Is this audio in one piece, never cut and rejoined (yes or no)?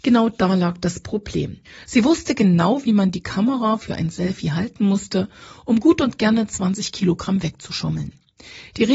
no